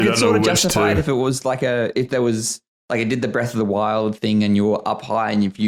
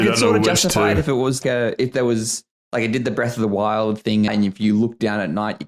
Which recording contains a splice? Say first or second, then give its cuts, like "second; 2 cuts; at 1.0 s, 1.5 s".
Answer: second; 2 cuts; at 1.4 s, 4.3 s